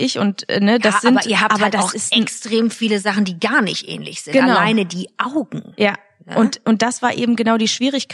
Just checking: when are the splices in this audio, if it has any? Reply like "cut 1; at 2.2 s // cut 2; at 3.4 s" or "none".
none